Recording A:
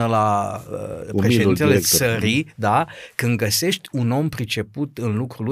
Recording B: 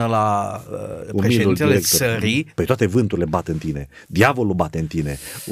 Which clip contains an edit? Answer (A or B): B